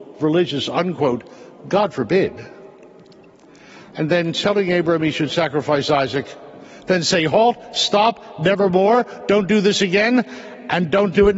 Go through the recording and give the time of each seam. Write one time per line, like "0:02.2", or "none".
none